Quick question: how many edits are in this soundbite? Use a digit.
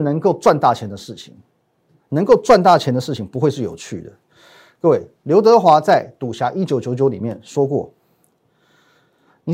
1